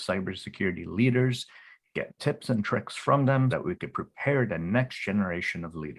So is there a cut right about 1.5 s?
no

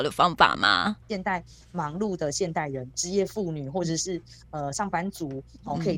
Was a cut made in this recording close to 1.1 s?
yes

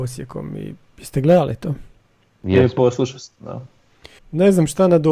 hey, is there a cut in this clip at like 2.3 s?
no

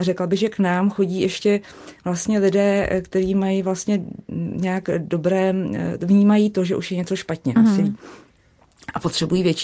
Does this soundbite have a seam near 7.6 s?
yes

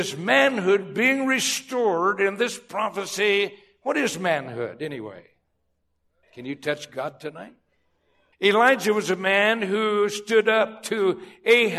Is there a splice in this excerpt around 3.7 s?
no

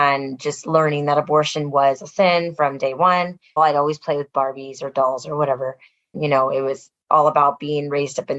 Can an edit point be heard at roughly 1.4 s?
no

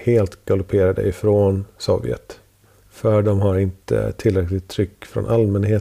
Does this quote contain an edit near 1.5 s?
no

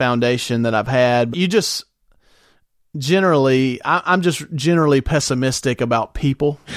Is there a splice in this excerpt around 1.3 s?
yes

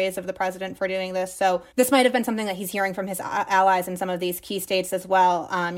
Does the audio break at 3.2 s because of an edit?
no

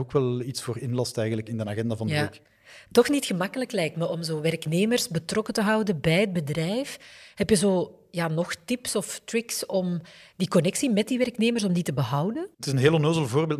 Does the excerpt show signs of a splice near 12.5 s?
yes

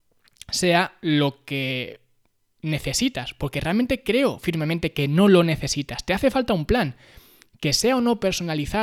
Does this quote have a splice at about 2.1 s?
no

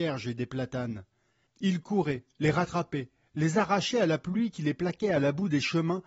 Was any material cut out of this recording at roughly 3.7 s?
no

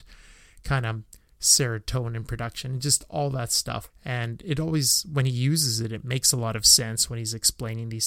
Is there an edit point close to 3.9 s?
yes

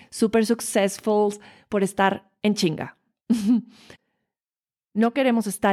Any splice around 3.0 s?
no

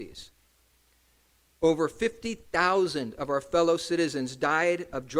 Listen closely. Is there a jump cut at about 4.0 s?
no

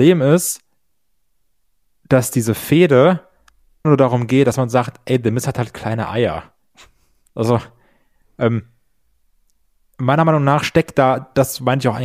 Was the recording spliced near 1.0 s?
no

